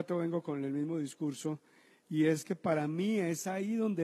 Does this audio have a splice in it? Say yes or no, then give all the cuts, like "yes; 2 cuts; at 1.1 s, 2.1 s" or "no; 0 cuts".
no; 0 cuts